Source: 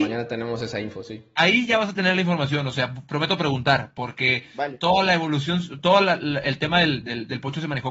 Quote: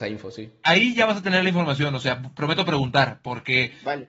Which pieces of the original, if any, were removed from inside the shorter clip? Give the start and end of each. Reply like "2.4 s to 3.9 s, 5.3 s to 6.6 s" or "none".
none